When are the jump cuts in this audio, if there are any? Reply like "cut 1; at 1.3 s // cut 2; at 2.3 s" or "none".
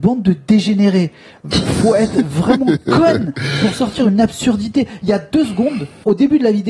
none